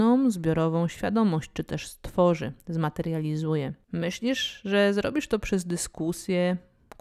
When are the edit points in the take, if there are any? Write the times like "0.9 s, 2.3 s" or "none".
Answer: 3.8 s